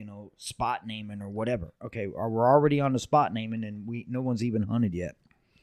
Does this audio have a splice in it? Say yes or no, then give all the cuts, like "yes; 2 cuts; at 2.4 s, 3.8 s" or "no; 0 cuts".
no; 0 cuts